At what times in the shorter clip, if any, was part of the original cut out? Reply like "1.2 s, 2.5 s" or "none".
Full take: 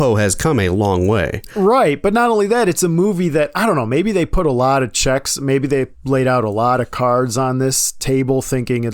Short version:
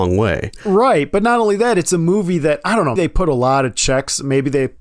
3.0 s

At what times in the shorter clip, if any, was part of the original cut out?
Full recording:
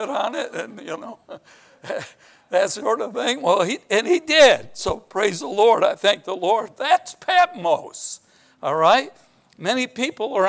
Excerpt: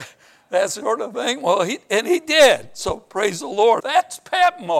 3.8 s

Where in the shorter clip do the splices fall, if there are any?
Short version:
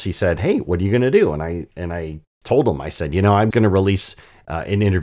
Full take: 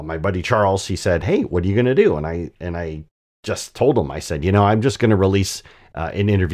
2.4 s, 3.5 s

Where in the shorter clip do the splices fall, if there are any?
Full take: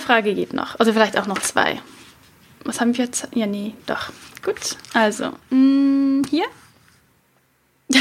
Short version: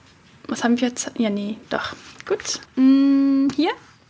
2.7 s

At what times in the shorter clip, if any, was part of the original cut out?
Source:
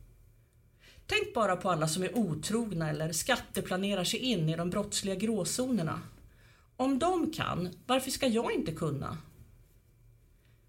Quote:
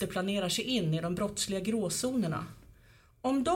none

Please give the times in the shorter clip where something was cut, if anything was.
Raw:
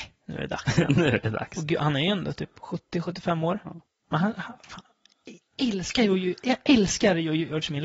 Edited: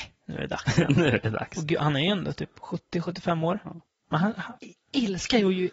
4.6 s

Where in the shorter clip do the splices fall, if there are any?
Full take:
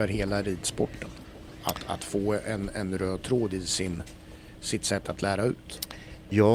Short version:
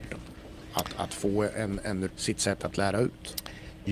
2.1 s

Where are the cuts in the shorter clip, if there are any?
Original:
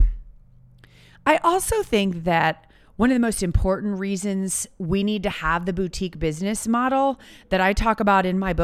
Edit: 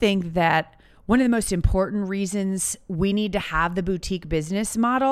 none

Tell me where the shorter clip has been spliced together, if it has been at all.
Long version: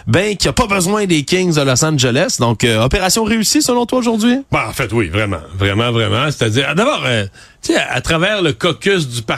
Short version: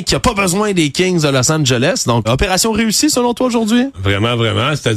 2.2 s, 3.9 s

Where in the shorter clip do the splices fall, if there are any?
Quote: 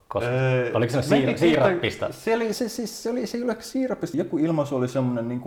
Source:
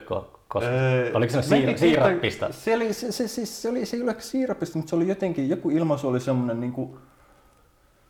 2.5 s, 4.1 s

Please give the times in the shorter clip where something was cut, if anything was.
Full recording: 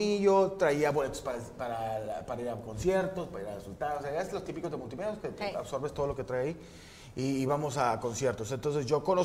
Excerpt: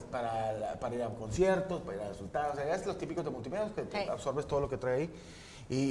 none

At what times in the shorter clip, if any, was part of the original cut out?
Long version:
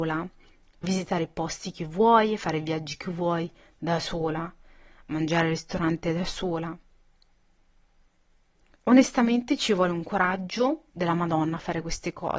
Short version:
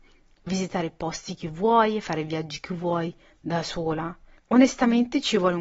4.3 s

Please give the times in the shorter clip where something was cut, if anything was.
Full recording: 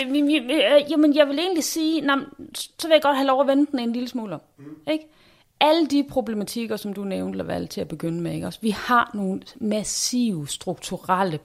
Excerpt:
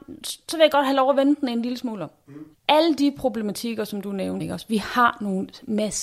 2.5 s, 4.4 s

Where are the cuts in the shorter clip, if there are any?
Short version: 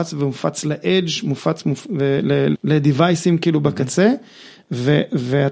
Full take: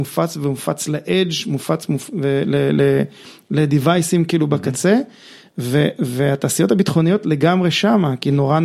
2.5 s

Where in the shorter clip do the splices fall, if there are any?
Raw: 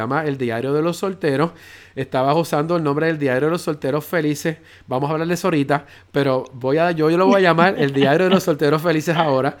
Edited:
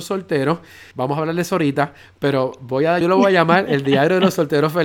0.9 s, 3.0 s

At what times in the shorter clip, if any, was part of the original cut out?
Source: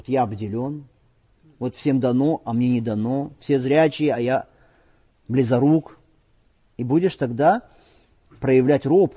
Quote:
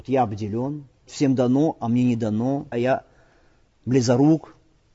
1.1 s, 2.7 s

